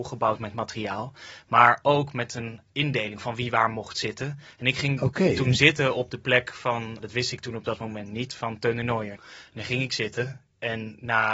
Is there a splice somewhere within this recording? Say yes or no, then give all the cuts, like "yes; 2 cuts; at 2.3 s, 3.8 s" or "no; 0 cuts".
yes; 2 cuts; at 7.0 s, 9.2 s